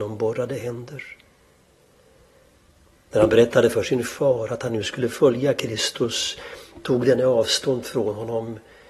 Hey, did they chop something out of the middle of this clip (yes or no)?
yes